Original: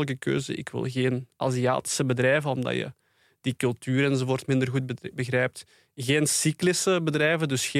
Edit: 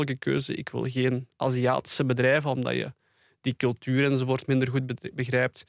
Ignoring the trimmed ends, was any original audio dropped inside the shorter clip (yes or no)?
no